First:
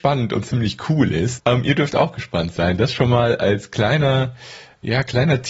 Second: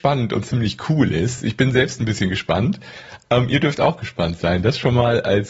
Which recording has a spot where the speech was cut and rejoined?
first; 1 cut; at 1.4 s

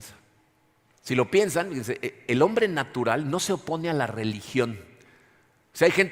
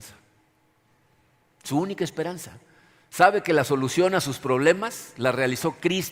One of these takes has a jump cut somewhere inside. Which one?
first; 1 cut; at 0.9 s

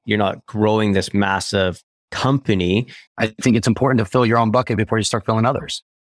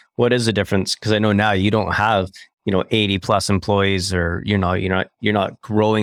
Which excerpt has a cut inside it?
first; 1 cut; at 3.1 s

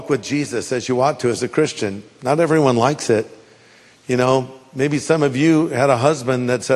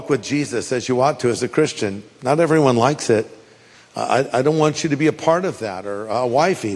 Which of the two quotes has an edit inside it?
second; 1 cut; at 3.7 s

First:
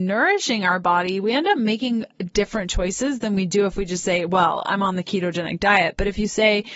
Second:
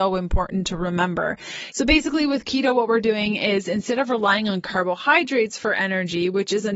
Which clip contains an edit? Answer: second; 1 cut; at 1.7 s

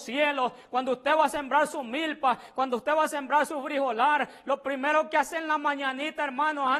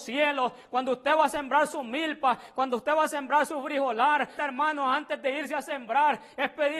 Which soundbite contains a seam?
second; 1 cut; at 4.4 s

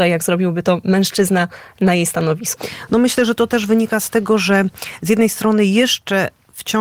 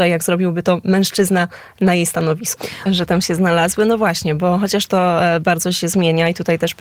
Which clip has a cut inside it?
second; 1 cut; at 2.9 s

